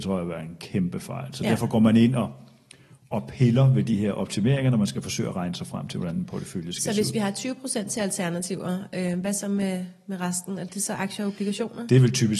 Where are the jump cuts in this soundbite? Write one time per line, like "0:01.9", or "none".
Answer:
none